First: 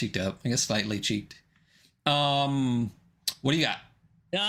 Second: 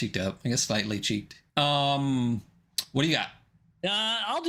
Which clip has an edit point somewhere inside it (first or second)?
second